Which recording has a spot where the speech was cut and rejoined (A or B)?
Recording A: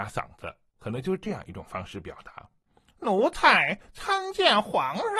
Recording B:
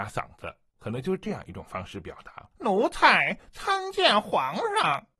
B